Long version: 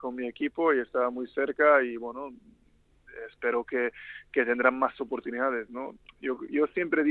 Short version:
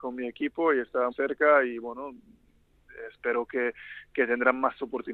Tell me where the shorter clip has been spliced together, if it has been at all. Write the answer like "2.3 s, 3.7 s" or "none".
1.1 s